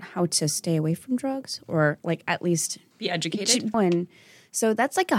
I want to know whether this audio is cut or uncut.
cut